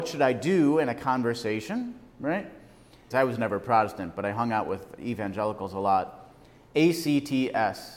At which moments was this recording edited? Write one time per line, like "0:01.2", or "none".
0:03.1